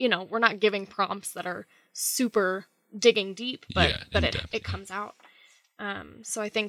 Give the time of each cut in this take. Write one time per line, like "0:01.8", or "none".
none